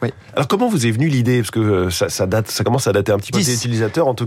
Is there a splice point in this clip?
yes; 1 cut; at 3.3 s

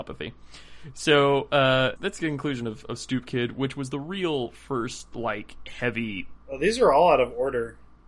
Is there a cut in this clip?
yes; 2 cuts; at 2.0 s, 6.3 s

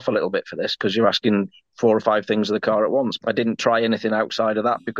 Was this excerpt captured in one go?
no; 1 cut; at 3.2 s

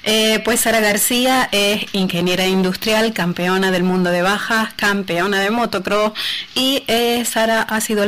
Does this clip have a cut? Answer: no; 0 cuts

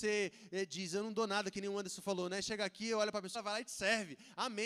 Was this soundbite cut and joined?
yes; 1 cut; at 3.3 s

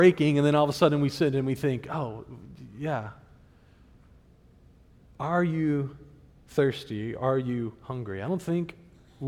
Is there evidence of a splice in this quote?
no; 0 cuts

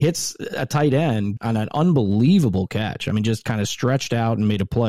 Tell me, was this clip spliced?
yes; 1 cut; at 1.4 s

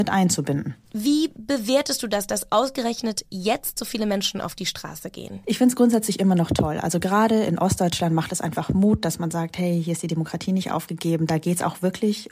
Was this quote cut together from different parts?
no; 0 cuts

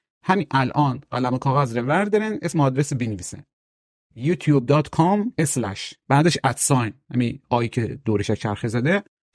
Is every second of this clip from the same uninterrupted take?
yes; 0 cuts

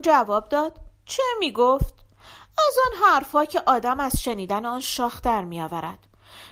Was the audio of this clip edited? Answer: no; 0 cuts

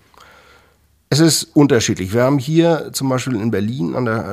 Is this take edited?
no; 0 cuts

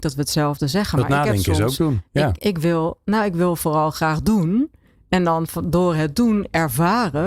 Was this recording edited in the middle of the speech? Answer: yes; 1 cut; at 2.4 s

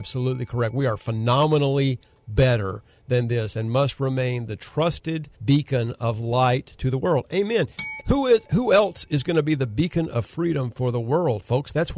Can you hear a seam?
yes; 2 cuts; at 5.3 s, 8.0 s

